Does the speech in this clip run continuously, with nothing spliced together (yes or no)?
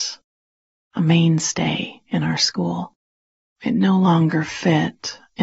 no